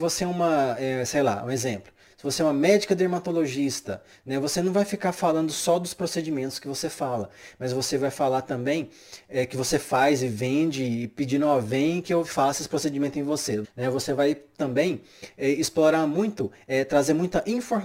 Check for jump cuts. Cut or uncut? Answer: cut